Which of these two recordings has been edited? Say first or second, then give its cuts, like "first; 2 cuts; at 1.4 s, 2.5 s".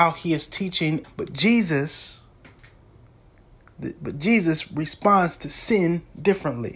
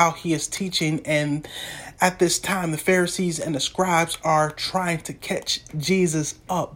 first; 1 cut; at 1.0 s